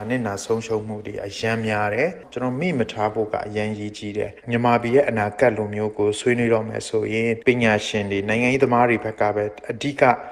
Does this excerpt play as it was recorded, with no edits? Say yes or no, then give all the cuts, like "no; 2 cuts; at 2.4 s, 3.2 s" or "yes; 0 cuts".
no; 1 cut; at 4.4 s